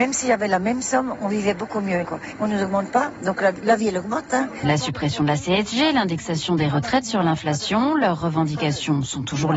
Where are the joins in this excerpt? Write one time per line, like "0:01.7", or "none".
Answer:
0:02.0
0:04.6